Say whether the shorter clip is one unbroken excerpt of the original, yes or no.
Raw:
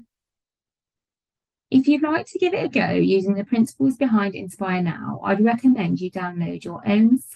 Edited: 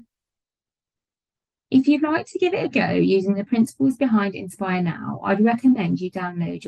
yes